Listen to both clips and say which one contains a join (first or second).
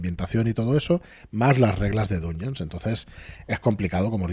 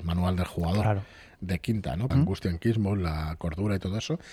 second